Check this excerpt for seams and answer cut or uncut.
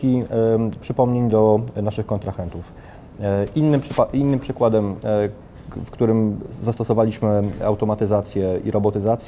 uncut